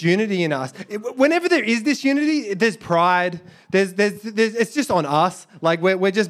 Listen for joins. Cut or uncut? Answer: uncut